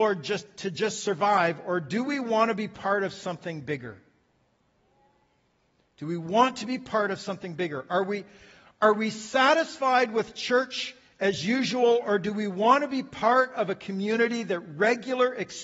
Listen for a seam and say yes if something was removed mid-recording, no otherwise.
no